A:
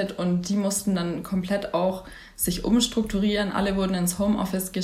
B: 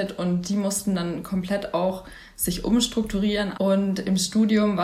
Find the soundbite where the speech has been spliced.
B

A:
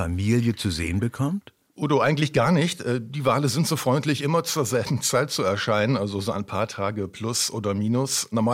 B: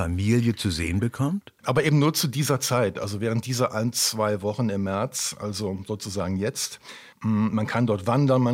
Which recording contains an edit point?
B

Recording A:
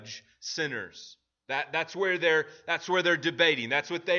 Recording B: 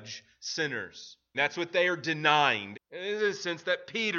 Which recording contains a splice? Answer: B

